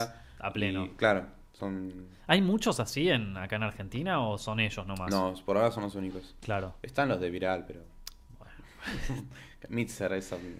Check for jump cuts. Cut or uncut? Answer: uncut